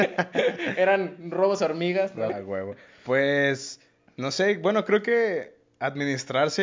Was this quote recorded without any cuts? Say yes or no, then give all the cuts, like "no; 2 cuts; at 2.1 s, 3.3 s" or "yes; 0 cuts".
no; 1 cut; at 2.3 s